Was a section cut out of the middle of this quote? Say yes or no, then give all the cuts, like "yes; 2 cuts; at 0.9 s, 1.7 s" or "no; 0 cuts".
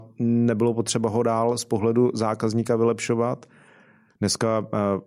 yes; 1 cut; at 4.1 s